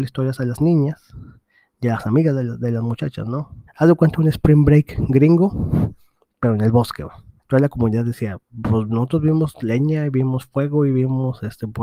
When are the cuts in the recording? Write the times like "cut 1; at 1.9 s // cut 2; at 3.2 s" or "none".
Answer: cut 1; at 3.7 s // cut 2; at 7.4 s